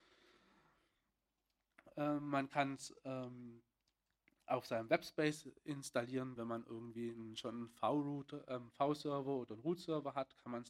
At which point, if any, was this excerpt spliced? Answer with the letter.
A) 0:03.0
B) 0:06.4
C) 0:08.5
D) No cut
B